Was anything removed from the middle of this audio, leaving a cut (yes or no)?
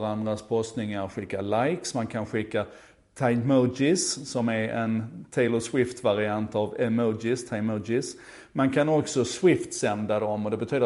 no